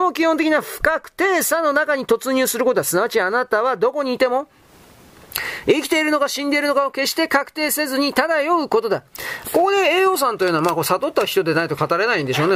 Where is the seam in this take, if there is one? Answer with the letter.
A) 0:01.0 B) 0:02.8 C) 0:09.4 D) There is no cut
C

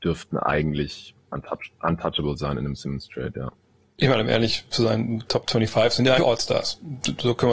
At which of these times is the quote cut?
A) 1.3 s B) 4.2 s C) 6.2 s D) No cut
C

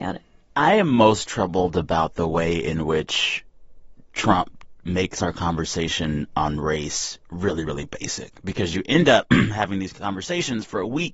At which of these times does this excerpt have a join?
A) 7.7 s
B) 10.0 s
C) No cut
C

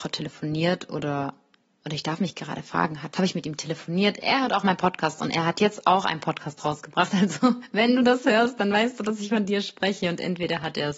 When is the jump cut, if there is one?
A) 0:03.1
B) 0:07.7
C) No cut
A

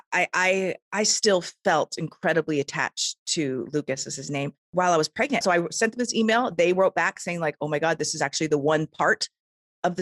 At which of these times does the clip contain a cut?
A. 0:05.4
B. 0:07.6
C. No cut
A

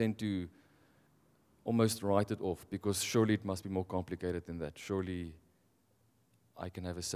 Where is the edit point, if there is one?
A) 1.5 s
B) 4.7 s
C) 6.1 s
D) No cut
D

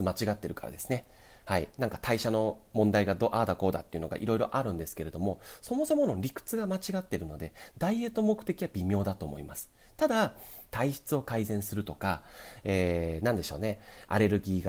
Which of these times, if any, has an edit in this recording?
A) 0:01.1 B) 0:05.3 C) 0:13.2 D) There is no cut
D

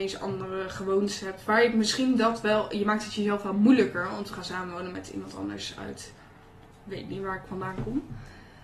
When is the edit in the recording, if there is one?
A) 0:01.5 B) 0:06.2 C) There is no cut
C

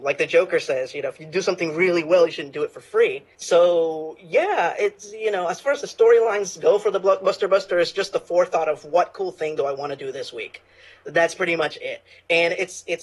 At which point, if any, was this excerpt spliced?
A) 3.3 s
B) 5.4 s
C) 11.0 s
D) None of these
A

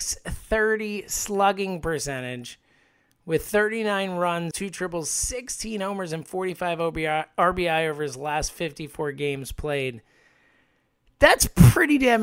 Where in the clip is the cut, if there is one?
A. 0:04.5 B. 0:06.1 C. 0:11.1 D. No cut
A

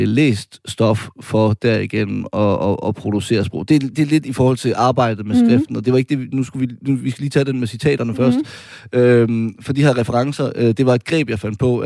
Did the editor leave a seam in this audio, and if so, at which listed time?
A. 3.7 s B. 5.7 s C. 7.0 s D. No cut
D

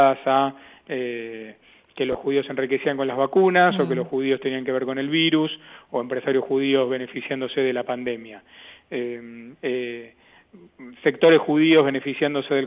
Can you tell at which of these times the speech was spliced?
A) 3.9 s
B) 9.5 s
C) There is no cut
B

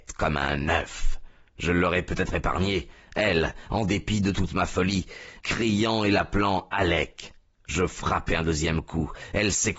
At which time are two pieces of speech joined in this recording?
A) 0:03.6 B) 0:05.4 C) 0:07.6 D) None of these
B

